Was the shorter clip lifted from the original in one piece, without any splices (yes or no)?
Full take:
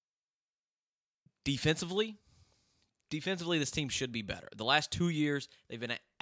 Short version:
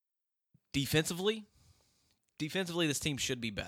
yes